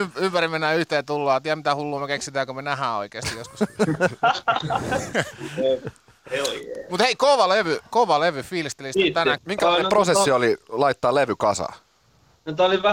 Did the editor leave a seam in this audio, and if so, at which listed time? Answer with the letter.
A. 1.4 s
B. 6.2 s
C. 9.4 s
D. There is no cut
C